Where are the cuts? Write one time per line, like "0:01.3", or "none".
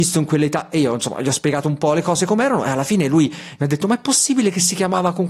none